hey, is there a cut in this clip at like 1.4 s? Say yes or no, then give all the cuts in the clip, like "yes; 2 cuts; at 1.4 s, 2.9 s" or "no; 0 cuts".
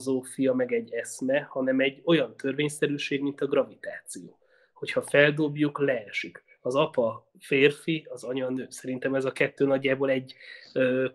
no; 1 cut; at 7.3 s